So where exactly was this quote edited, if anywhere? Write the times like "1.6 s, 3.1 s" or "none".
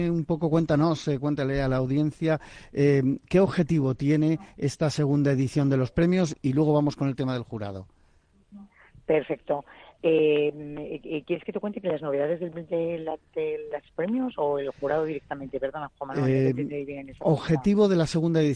none